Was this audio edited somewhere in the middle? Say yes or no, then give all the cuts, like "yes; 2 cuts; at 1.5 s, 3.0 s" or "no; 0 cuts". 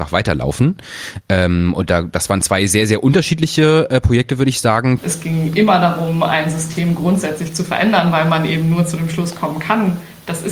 yes; 1 cut; at 5.0 s